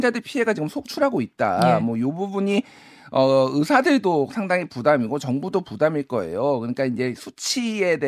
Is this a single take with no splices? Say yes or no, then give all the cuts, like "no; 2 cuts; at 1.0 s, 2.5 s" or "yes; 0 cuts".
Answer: yes; 0 cuts